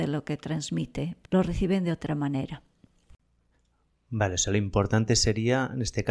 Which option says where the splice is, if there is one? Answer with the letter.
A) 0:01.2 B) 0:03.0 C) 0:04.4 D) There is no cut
A